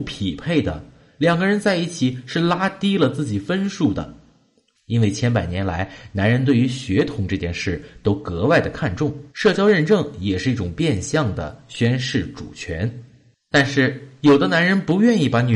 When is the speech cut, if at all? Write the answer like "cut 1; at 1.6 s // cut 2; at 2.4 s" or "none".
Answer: cut 1; at 4.7 s // cut 2; at 9.3 s